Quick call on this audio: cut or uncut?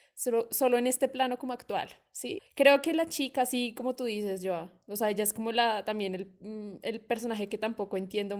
cut